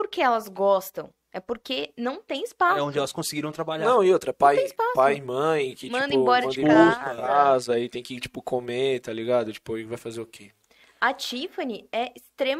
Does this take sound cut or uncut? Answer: uncut